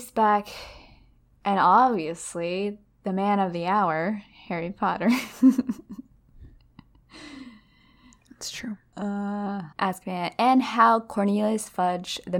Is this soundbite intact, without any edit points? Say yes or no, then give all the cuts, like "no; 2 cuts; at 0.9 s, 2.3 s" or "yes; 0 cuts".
no; 1 cut; at 9.7 s